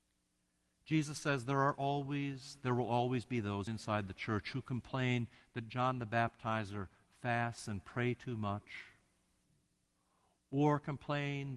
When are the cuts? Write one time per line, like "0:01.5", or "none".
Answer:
0:03.7